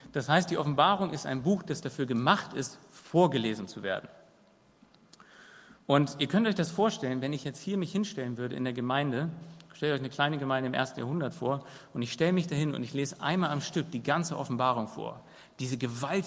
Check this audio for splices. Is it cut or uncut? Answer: uncut